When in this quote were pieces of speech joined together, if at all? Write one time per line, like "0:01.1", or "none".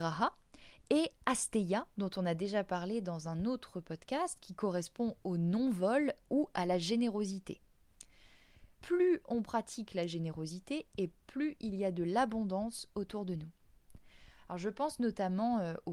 0:08.7